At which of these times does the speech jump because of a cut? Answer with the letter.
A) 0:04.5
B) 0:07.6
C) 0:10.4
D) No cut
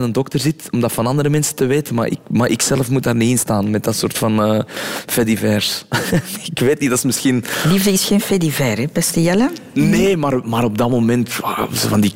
D